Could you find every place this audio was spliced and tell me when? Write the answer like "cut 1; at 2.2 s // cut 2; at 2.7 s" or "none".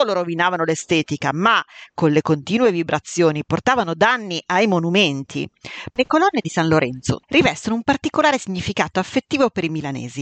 cut 1; at 5.9 s // cut 2; at 7.2 s